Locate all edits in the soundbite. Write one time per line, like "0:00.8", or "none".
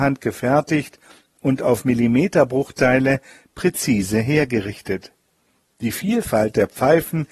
none